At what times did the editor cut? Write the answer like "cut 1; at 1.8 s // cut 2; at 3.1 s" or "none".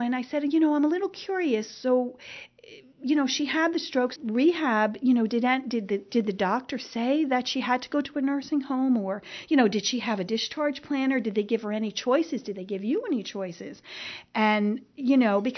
cut 1; at 4.2 s